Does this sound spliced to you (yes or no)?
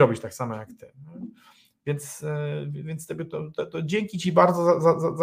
no